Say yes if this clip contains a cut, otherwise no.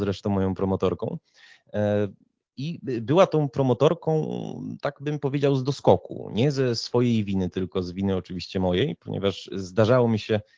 no